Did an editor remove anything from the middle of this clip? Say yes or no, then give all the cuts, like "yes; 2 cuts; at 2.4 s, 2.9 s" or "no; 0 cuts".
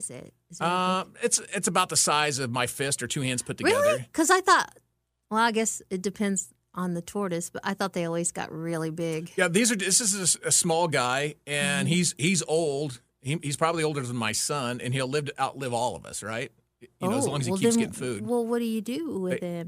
no; 0 cuts